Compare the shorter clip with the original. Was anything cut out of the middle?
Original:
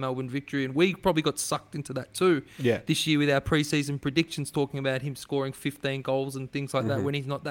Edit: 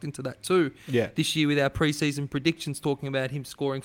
no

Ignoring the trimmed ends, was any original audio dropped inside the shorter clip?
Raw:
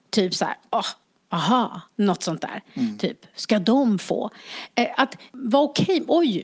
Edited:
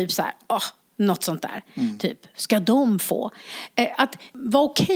yes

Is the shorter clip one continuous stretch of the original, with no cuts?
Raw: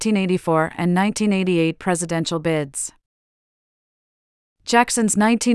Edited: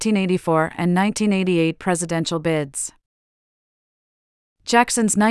yes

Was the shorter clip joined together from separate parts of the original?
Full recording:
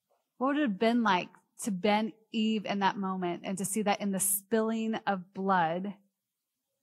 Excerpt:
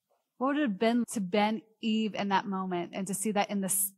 yes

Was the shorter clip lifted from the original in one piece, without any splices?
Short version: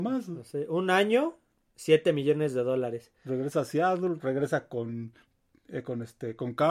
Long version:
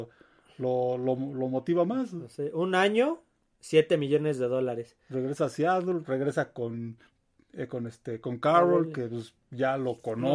yes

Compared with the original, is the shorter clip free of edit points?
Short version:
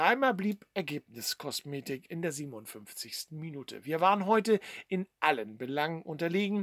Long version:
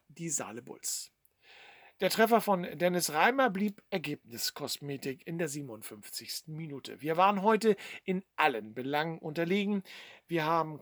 yes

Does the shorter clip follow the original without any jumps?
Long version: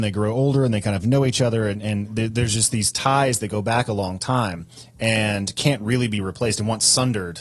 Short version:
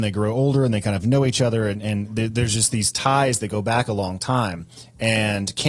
yes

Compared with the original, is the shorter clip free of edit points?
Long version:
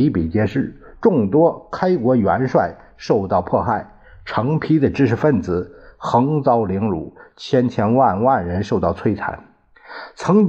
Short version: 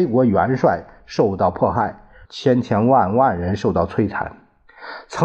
no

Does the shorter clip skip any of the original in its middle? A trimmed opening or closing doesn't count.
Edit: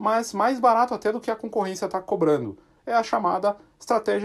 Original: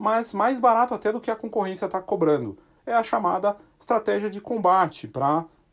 no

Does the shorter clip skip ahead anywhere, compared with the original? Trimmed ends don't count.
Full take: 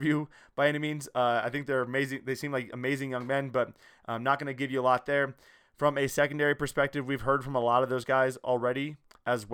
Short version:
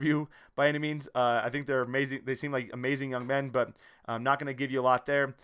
no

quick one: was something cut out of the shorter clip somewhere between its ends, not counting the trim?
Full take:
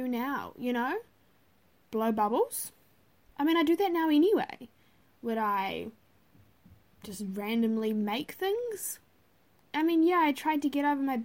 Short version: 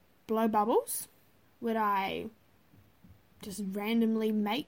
yes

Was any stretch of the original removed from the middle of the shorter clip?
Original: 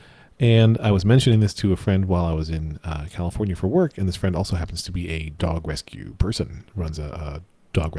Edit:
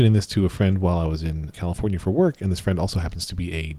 yes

